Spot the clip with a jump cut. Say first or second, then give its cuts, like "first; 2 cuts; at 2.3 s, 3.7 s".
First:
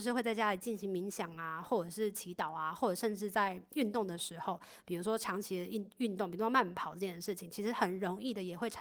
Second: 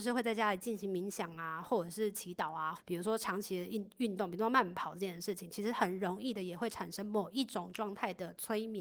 second; 1 cut; at 2.8 s